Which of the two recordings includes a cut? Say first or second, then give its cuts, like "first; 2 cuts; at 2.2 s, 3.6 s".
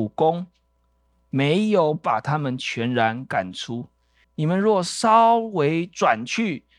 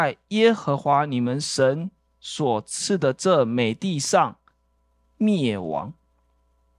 first; 1 cut; at 4.2 s